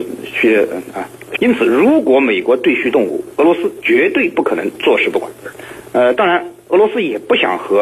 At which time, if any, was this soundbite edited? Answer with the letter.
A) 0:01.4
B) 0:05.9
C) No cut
A